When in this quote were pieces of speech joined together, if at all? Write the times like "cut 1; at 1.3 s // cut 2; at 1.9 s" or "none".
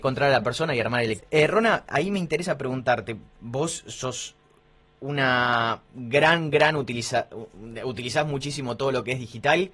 cut 1; at 1.2 s